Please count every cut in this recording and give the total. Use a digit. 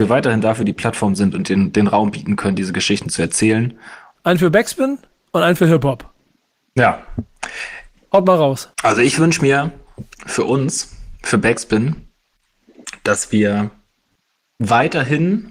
2